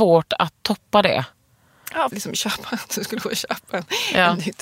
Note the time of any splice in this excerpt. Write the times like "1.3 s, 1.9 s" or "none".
2.1 s